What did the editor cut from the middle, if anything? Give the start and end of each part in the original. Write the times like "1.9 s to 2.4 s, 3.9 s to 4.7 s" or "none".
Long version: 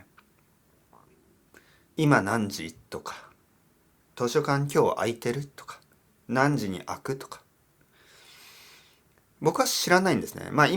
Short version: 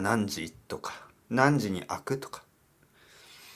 3.5 s to 6.2 s